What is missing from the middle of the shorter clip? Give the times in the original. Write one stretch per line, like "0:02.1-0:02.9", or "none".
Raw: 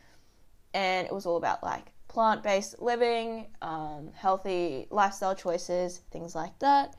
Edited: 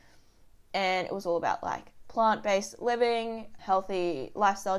0:03.6-0:04.1